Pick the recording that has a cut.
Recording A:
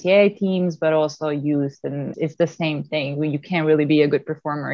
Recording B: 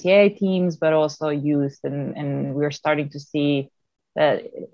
A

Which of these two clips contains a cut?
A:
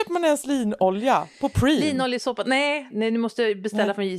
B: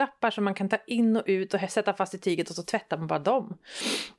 A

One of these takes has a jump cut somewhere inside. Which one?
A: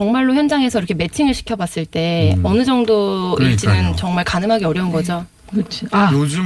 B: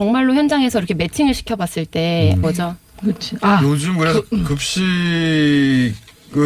B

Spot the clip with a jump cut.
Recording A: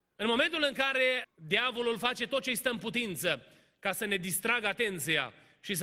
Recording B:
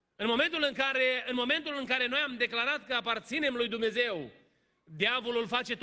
A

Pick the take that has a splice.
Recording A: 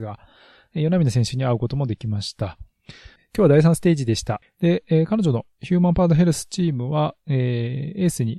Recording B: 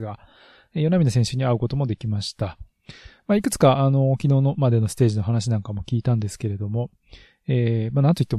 A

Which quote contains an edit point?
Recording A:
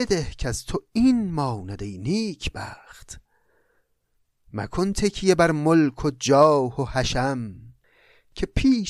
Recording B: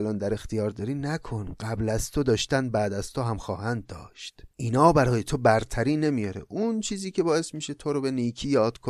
B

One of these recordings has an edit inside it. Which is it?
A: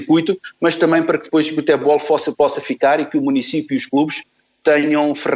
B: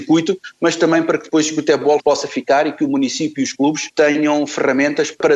B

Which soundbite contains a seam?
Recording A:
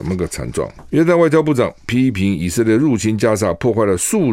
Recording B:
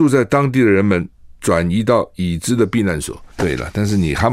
B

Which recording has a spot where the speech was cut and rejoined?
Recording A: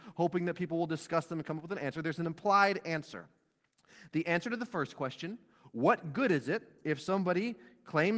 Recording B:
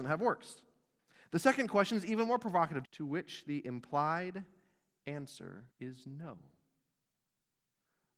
B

